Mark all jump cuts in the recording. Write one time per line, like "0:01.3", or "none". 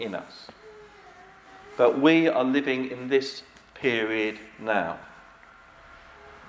none